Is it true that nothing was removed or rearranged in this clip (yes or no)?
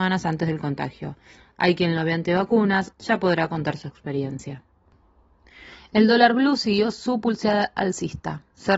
no